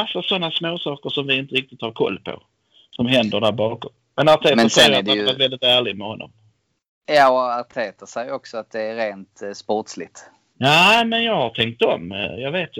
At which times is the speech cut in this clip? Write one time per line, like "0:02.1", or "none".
0:10.5